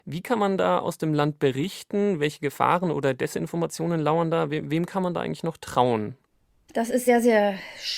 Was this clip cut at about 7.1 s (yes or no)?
no